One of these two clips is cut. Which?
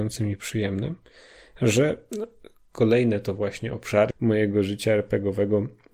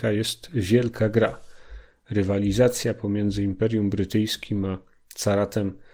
first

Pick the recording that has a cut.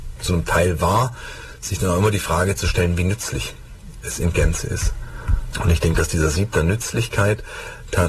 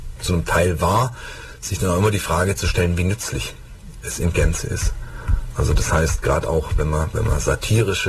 first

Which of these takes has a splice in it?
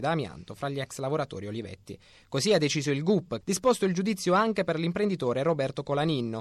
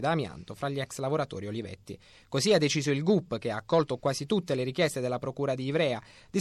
first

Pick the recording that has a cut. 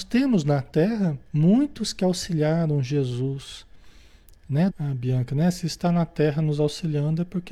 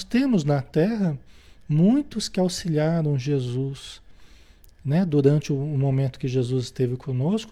first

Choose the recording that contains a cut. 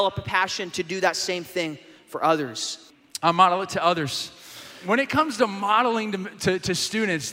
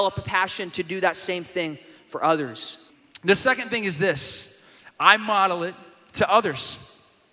first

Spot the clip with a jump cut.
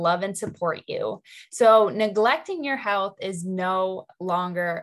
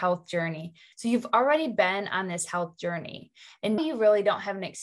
second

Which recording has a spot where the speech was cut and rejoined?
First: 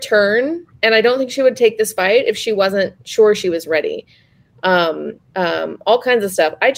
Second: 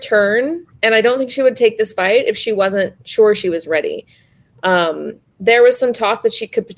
first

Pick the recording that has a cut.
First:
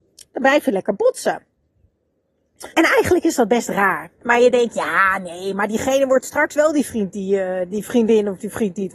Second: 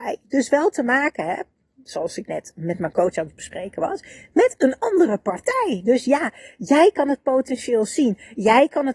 first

